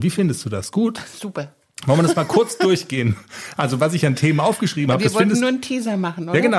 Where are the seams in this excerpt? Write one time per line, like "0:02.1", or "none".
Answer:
none